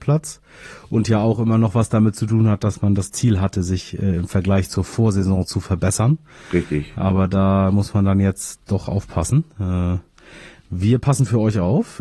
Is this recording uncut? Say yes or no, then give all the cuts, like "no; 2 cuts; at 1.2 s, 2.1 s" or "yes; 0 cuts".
yes; 0 cuts